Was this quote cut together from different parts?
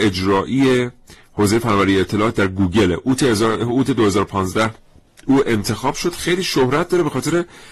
no; 0 cuts

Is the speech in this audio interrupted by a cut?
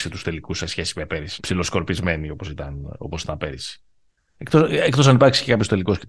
yes; 2 cuts; at 1.4 s, 4.3 s

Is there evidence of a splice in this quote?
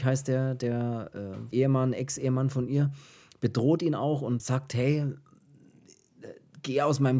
yes; 2 cuts; at 1.5 s, 4.4 s

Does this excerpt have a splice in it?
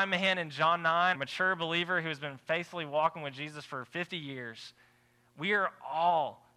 yes; 1 cut; at 1.1 s

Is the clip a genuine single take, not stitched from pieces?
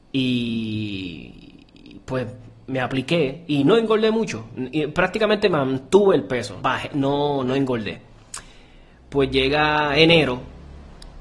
no; 1 cut; at 6.6 s

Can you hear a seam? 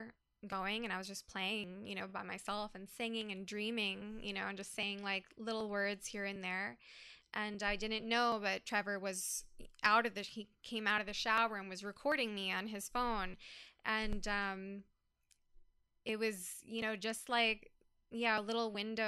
no; 0 cuts

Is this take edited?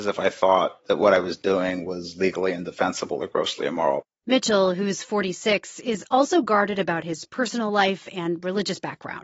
no; 0 cuts

